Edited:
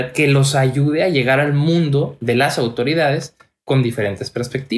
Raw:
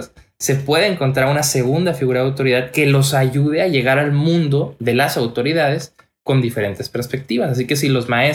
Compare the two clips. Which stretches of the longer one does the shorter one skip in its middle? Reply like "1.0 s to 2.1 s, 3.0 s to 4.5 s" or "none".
none